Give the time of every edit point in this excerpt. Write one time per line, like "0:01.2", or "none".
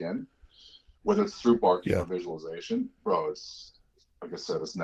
none